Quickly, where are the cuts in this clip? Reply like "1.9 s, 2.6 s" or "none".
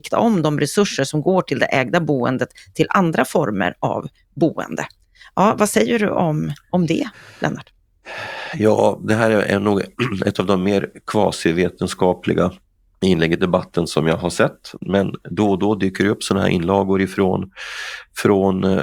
none

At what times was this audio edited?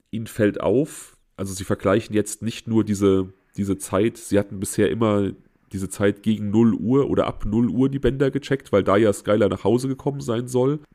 none

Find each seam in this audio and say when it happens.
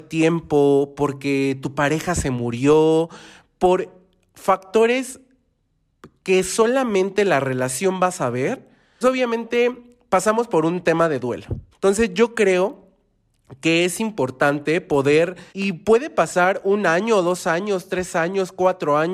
9.0 s, 11.7 s, 15.5 s

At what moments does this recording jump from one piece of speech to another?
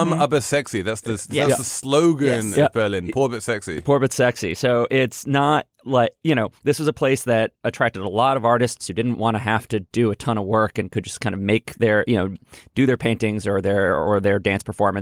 none

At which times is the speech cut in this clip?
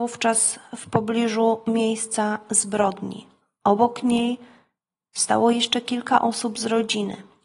none

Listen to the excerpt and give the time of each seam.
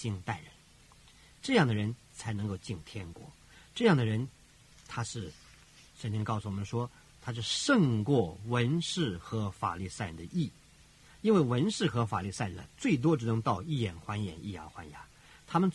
none

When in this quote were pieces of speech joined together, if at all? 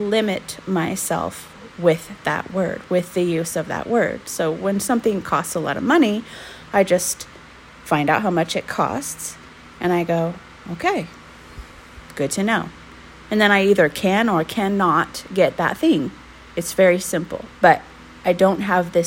17.5 s

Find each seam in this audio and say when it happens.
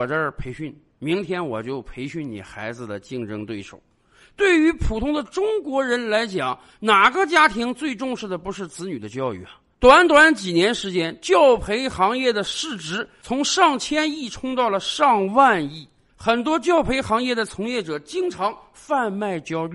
9.7 s

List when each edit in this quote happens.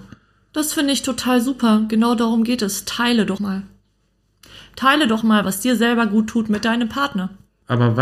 3.4 s, 5.2 s

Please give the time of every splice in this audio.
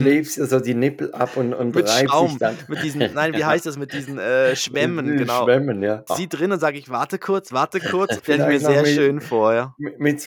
6.1 s, 8.2 s

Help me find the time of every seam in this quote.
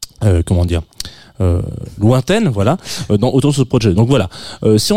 none

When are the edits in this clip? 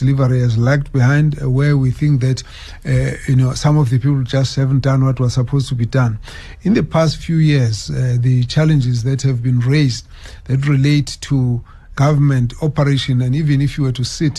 11.9 s

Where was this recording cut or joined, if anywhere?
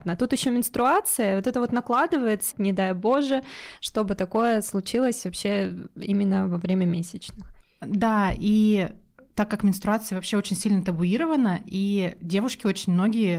2.5 s

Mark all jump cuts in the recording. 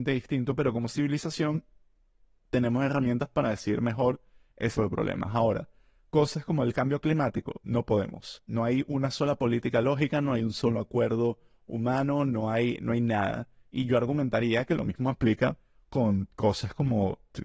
4.7 s

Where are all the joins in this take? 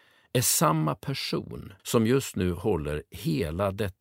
1.8 s

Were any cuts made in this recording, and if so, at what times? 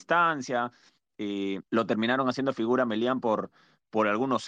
1.7 s

